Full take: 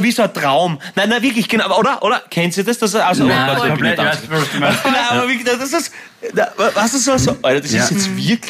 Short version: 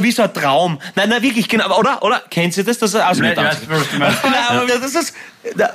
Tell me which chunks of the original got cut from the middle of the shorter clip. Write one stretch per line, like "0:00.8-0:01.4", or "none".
0:03.2-0:03.8
0:05.3-0:05.4